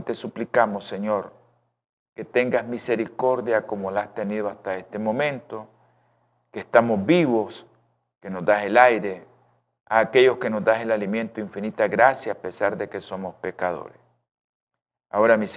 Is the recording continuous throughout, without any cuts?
yes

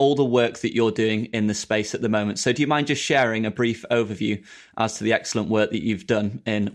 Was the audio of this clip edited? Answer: no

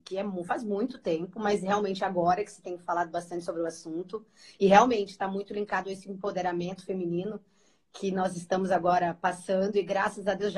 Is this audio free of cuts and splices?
yes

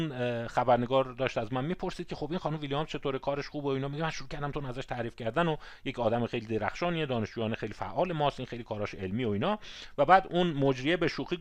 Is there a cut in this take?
yes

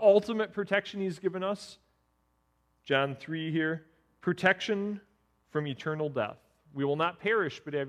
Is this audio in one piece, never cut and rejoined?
yes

